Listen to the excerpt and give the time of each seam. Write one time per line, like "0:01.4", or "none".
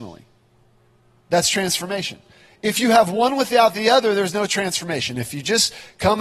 none